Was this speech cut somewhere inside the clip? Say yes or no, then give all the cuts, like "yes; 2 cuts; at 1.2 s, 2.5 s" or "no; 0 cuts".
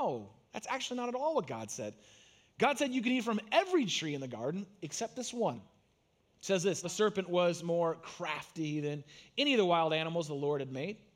yes; 2 cuts; at 5.5 s, 6.8 s